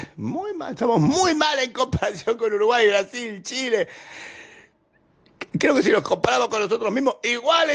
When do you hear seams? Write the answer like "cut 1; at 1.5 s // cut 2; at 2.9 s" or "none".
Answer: none